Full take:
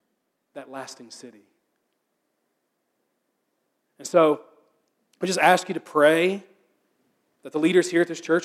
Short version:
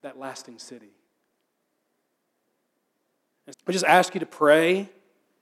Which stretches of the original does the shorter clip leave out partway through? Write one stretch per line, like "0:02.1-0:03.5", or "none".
0:04.0-0:05.0